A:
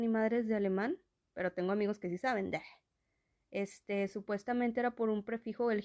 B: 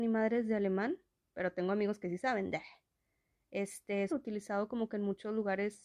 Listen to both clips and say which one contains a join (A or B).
B